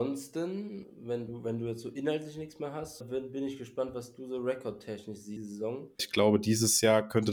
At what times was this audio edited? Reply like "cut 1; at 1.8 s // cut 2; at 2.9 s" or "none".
cut 1; at 3.0 s // cut 2; at 6.0 s